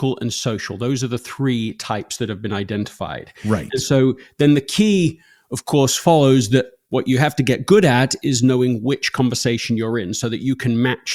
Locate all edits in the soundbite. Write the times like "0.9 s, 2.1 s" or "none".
none